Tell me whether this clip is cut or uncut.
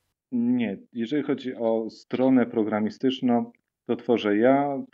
uncut